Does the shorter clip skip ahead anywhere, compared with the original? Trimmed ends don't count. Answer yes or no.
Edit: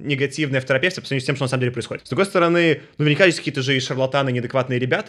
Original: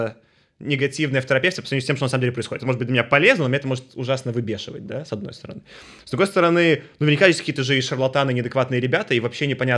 yes